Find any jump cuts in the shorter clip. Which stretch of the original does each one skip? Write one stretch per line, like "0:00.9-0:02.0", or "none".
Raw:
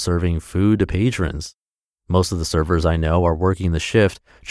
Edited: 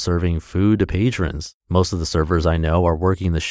0:01.6-0:02.0